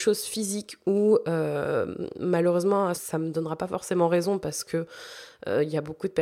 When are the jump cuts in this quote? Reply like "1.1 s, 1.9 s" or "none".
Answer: 2.9 s